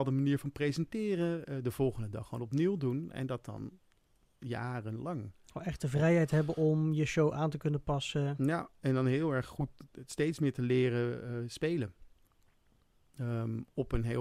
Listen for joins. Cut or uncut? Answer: uncut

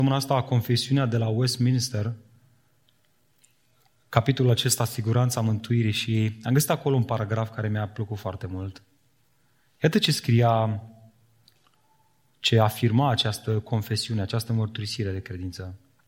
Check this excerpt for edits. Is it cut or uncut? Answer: uncut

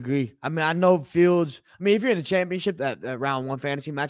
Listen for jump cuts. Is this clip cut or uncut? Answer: cut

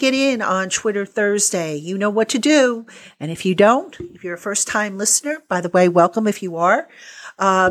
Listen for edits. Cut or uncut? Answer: uncut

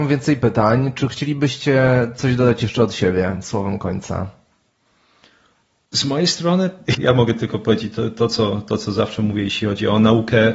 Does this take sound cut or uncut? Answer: cut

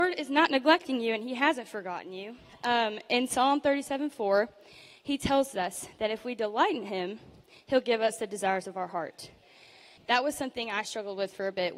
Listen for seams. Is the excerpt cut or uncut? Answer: cut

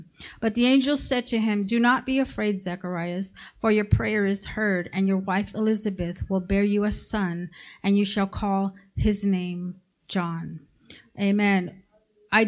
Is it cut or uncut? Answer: uncut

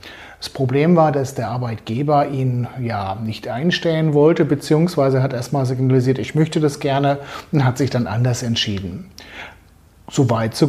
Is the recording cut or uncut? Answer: uncut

